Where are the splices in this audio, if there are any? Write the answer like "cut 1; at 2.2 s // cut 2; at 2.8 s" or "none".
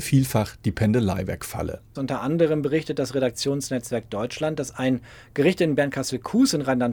cut 1; at 2.0 s